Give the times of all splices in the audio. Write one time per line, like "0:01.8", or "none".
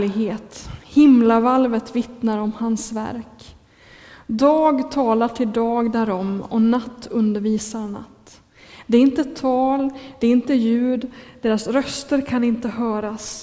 none